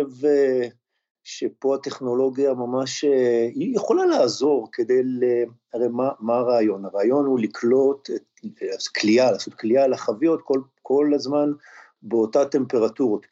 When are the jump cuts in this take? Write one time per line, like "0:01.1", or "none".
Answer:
none